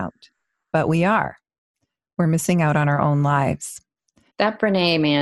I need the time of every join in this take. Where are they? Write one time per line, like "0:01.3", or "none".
0:04.3